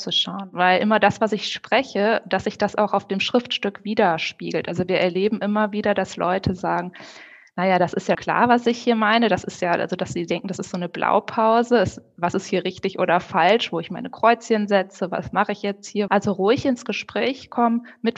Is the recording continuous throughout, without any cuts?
no; 2 cuts; at 8.1 s, 16.1 s

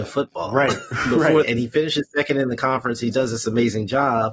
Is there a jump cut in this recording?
yes; 1 cut; at 1.4 s

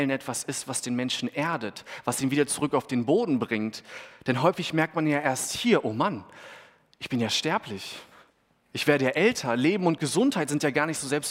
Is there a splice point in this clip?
no; 0 cuts

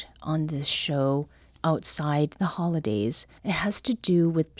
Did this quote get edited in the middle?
yes; 1 cut; at 3.4 s

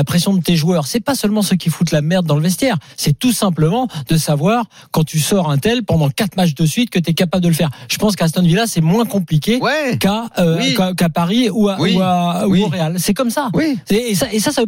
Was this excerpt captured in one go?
yes; 0 cuts

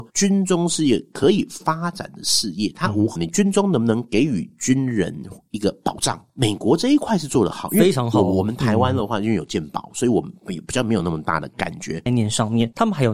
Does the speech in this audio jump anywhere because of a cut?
yes; 2 cuts; at 3.2 s, 12.1 s

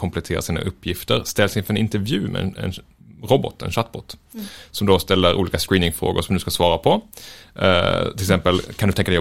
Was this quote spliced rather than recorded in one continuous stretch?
no; 0 cuts

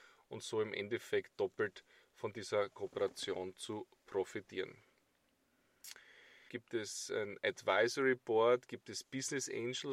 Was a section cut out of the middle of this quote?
yes; 1 cut; at 6.5 s

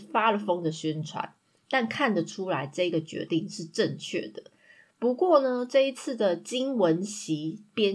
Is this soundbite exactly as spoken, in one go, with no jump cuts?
yes; 0 cuts

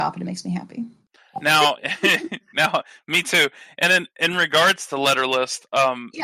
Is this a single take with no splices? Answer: yes; 0 cuts

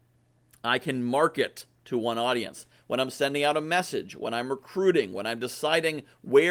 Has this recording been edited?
no; 0 cuts

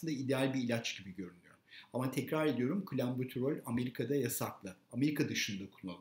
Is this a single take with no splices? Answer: yes; 0 cuts

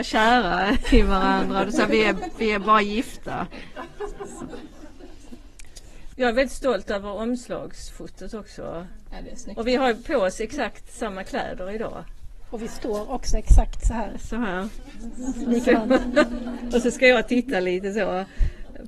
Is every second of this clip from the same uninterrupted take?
no; 1 cut; at 6.1 s

